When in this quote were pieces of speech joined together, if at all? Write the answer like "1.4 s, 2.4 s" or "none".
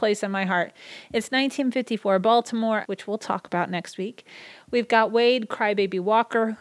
2.8 s